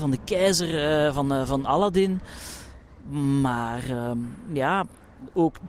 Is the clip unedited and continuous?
yes; 0 cuts

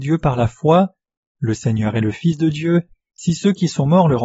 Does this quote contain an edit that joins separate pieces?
yes; 1 cut; at 3.1 s

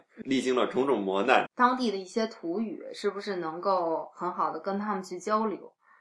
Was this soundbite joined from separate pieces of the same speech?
yes; 1 cut; at 1.5 s

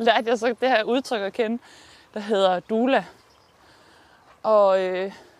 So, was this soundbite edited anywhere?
no; 0 cuts

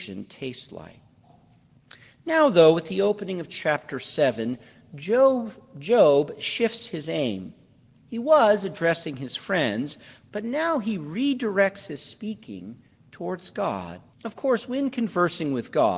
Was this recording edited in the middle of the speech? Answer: yes; 1 cut; at 14.1 s

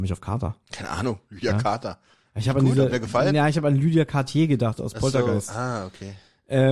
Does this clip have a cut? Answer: no; 0 cuts

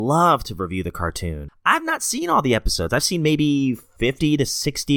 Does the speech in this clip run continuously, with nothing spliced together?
no; 1 cut; at 1.5 s

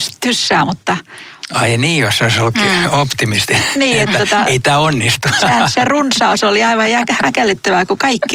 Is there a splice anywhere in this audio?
no; 0 cuts

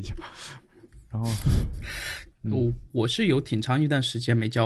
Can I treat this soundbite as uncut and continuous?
no; 1 cut; at 2.3 s

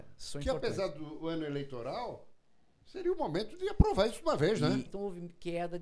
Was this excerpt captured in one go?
no; 1 cut; at 4.9 s

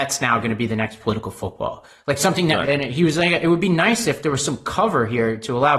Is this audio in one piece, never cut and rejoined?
no; 1 cut; at 2.6 s

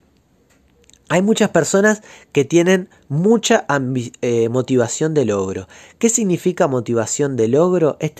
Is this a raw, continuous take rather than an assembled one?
yes; 0 cuts

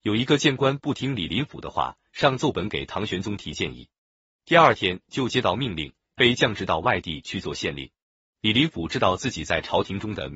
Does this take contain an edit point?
yes; 1 cut; at 8.3 s

